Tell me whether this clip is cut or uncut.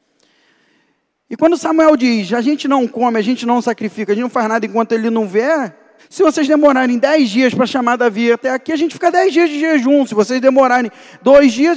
cut